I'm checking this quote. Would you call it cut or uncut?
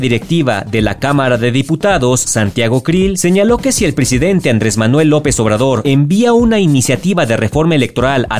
uncut